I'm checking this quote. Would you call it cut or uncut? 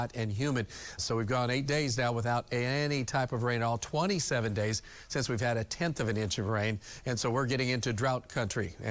cut